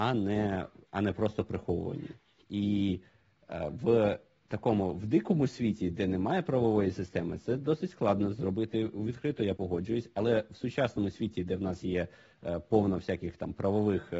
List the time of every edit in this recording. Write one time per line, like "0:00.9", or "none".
0:02.4